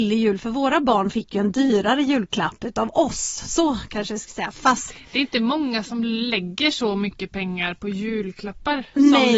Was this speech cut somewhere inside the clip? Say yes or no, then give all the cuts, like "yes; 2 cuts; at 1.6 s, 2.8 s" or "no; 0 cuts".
no; 0 cuts